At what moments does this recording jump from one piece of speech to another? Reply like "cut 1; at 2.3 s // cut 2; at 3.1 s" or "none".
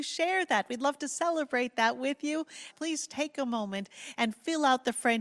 cut 1; at 2.7 s